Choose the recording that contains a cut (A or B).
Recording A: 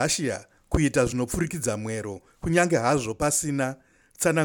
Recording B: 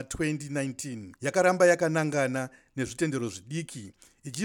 B